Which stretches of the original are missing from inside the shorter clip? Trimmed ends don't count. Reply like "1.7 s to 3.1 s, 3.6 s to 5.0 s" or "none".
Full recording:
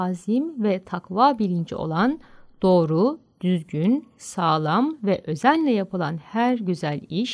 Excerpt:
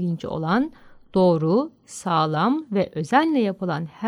3.3 s to 4.1 s